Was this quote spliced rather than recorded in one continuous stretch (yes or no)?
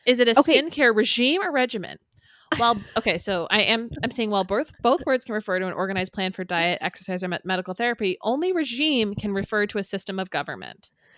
no